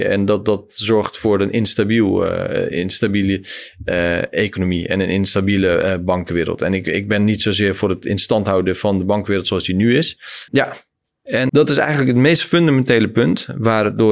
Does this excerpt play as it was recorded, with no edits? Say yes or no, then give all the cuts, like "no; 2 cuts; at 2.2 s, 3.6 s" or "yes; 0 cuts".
no; 2 cuts; at 10.5 s, 11.5 s